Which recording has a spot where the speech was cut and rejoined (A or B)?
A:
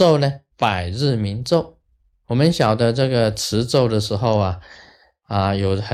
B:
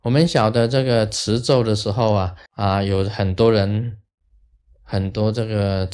B